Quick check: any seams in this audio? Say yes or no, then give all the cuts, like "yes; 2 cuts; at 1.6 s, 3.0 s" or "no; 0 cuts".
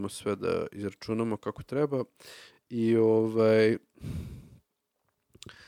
no; 0 cuts